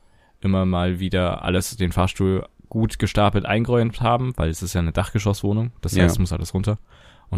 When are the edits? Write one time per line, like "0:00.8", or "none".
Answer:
none

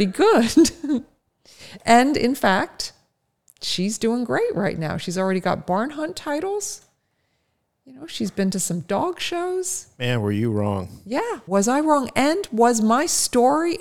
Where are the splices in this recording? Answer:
0:11.5

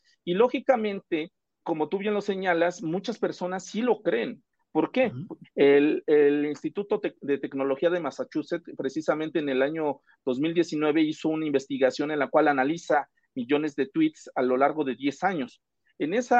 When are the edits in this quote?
0:01.6
0:05.4

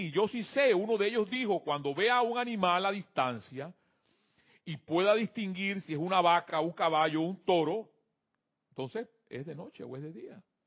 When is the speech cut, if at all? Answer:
none

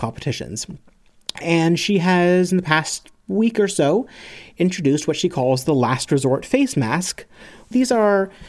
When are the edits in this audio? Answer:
none

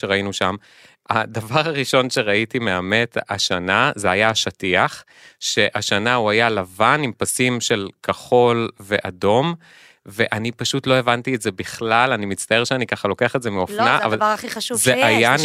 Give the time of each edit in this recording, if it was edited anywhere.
none

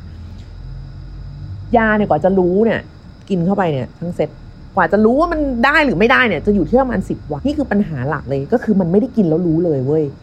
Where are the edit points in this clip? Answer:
0:07.4

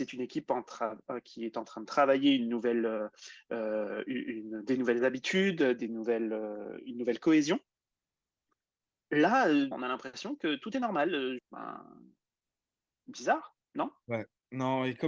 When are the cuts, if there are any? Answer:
0:09.7
0:11.4

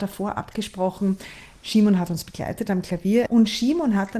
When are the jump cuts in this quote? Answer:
0:03.3

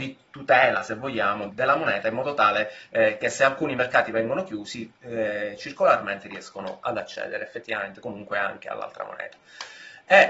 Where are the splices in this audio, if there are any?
0:01.5

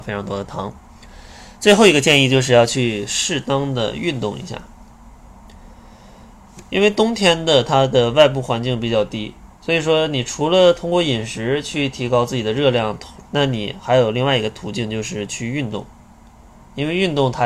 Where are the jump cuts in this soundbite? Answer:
0:09.5
0:13.2

